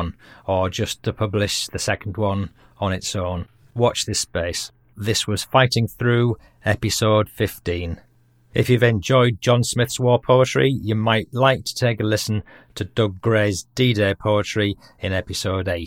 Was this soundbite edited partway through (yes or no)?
yes